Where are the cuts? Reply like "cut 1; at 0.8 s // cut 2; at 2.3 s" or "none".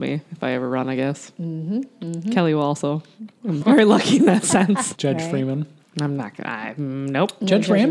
cut 1; at 3.6 s // cut 2; at 4.9 s